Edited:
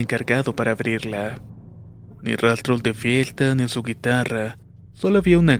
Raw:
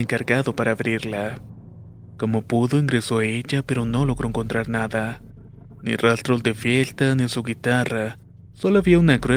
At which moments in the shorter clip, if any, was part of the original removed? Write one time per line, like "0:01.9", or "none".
0:02.1